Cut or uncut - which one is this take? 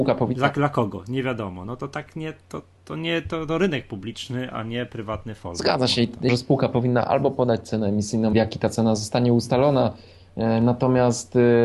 cut